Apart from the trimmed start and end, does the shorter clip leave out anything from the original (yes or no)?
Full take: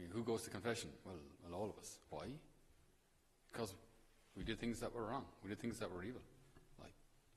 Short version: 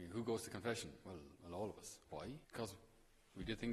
yes